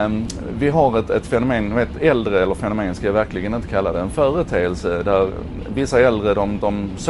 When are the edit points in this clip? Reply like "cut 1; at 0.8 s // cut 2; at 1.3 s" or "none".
none